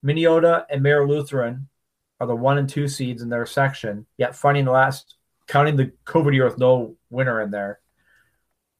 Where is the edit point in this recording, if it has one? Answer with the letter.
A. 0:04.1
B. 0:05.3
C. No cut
A